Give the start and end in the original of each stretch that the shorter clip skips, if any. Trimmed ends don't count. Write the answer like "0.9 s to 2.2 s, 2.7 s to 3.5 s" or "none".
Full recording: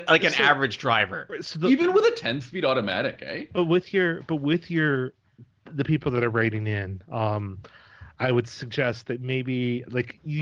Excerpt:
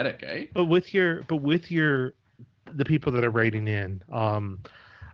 none

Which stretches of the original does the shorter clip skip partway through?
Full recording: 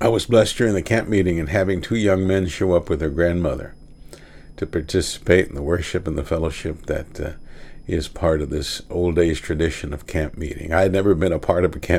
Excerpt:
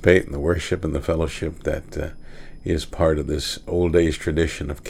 none

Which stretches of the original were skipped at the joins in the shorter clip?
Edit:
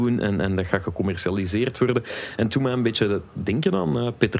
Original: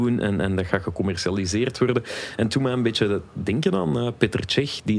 none

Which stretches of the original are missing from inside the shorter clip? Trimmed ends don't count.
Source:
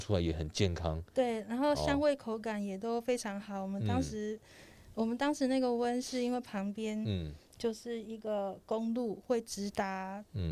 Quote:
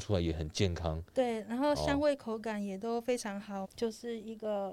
3.6 s to 7.5 s

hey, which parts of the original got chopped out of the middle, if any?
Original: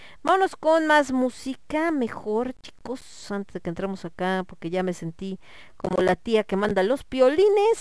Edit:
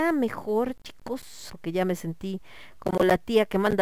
3.3 s to 4.5 s

